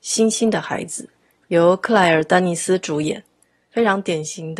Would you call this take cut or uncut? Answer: uncut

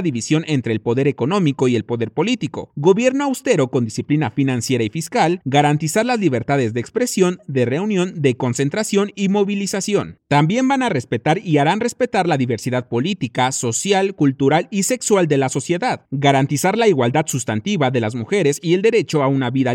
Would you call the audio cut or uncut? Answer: uncut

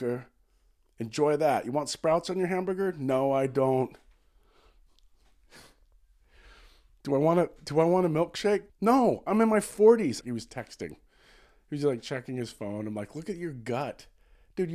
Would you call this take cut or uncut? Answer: cut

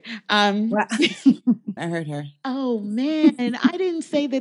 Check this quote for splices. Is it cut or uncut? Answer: cut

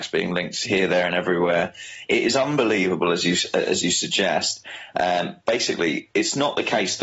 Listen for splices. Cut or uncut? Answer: uncut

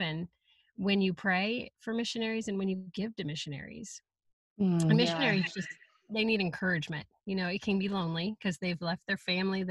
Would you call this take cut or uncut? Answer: uncut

